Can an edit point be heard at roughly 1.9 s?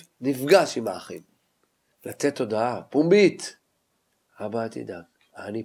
yes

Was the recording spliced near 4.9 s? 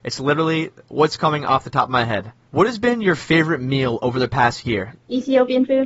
yes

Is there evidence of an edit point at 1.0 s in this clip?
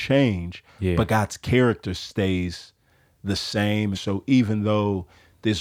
no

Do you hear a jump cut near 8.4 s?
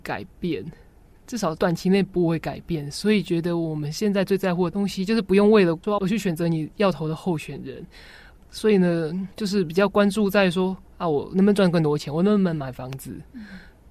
no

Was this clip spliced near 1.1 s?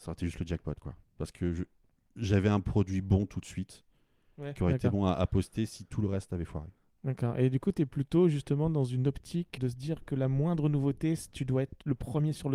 no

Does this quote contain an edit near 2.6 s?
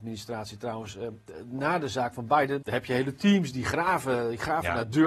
yes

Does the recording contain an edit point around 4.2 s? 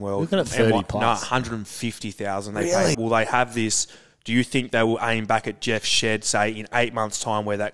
no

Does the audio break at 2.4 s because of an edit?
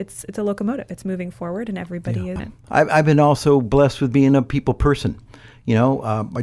yes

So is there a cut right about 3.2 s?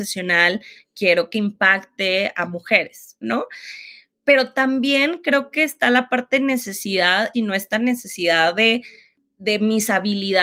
yes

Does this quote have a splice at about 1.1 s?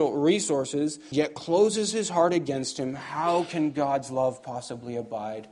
yes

